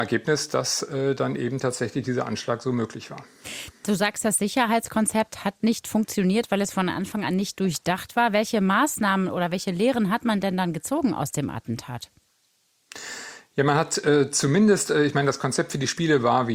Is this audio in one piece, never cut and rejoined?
yes; 0 cuts

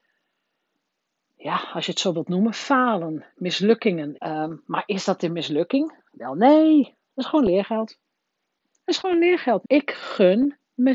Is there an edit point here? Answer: yes; 2 cuts; at 4.1 s, 9.6 s

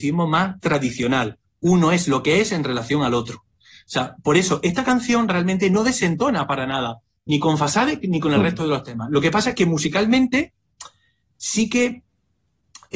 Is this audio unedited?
yes; 0 cuts

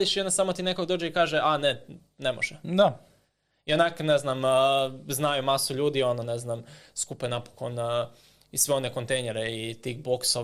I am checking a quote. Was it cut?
no; 0 cuts

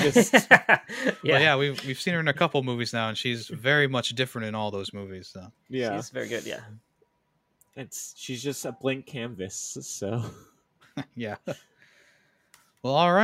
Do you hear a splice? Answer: no; 0 cuts

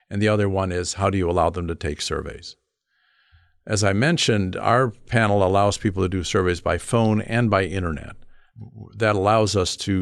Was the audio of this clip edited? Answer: no; 0 cuts

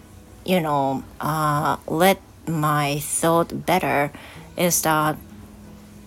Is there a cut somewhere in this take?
no; 0 cuts

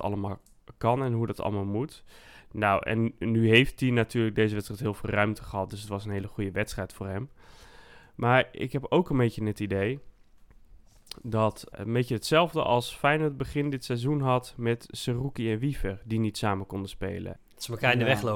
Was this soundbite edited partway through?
yes; 2 cuts; at 11.7 s, 17.4 s

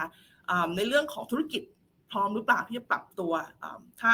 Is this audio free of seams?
yes; 0 cuts

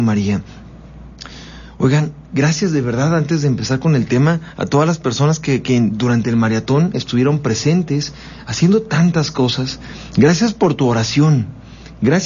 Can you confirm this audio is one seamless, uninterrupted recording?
no; 1 cut; at 8.4 s

